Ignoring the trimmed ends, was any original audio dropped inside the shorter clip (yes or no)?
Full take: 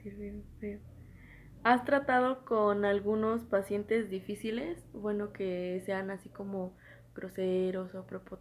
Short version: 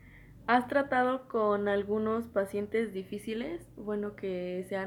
no